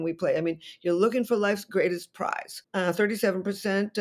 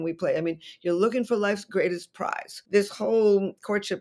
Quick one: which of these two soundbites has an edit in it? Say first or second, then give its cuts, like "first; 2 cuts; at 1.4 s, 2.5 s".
first; 1 cut; at 2.6 s